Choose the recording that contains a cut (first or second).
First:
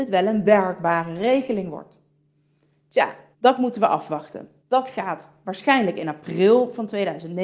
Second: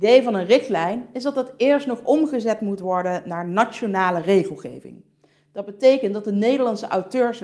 first